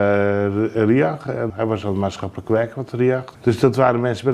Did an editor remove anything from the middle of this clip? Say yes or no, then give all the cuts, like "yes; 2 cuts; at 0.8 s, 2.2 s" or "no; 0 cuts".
yes; 2 cuts; at 1.5 s, 3.3 s